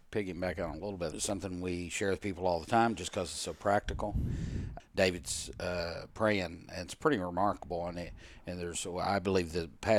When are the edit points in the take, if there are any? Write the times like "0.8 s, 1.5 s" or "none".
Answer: 1.1 s, 4.8 s